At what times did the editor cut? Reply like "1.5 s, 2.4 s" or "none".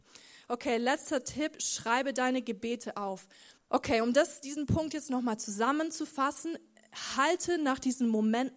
3.6 s